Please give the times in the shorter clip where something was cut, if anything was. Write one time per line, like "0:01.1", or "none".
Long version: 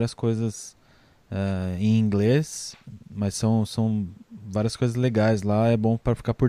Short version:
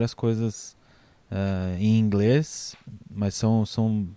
none